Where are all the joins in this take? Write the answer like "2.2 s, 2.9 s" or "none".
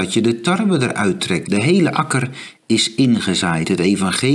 1.4 s